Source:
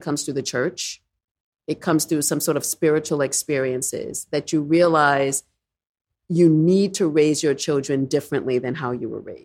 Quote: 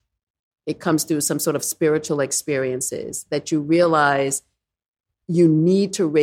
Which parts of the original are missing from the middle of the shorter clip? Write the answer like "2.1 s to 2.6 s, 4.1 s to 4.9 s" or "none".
none